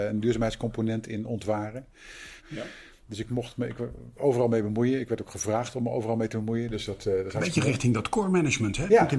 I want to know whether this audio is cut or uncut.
cut